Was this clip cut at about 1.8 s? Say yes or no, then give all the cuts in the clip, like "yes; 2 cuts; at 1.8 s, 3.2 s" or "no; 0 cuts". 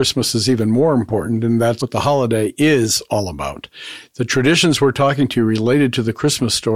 yes; 1 cut; at 1.8 s